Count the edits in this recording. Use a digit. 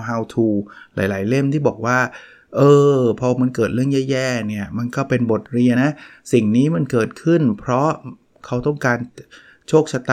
1